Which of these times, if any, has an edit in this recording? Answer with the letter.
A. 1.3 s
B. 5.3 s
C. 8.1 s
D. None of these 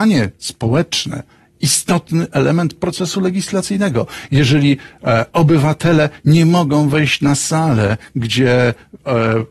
D